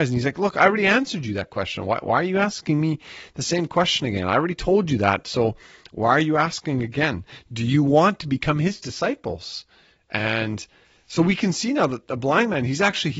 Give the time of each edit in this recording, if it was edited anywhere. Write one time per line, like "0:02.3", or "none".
none